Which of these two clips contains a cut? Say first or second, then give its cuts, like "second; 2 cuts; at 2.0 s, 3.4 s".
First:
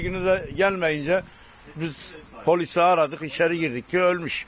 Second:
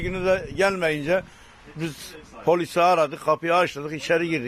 first; 1 cut; at 3.2 s